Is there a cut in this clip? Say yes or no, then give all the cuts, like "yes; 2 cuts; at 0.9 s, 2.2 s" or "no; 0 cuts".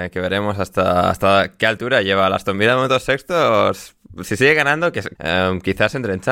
yes; 1 cut; at 5.1 s